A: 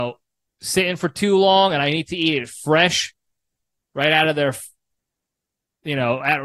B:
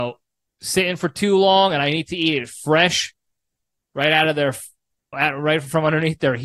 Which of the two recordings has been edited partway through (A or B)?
B